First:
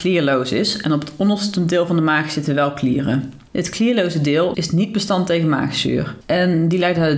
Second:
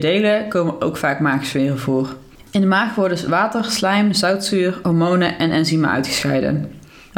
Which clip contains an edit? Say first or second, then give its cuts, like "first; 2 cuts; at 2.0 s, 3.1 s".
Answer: first; 2 cuts; at 4.5 s, 6.2 s